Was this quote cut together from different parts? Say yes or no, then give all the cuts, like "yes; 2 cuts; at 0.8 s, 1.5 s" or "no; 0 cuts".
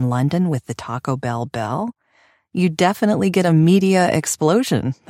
no; 0 cuts